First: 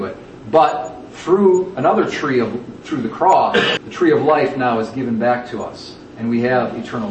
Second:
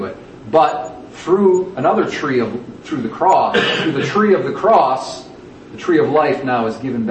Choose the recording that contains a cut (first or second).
first